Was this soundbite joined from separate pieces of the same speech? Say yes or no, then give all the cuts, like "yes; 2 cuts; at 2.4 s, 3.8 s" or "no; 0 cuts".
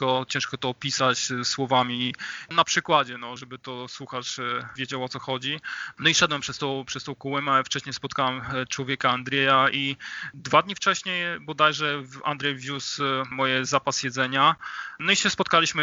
yes; 3 cuts; at 3.4 s, 5.9 s, 13.3 s